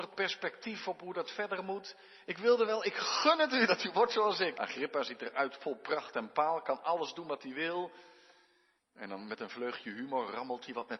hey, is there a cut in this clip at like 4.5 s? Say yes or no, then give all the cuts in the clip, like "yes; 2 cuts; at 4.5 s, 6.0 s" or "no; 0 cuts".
yes; 2 cuts; at 4.5 s, 8.8 s